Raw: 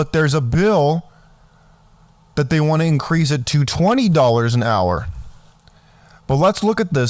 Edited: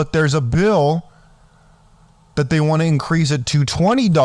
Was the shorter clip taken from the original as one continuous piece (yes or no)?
yes